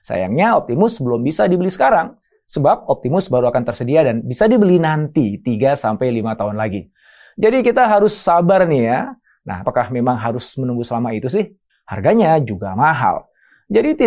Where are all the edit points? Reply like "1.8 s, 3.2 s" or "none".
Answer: 9.6 s, 11.7 s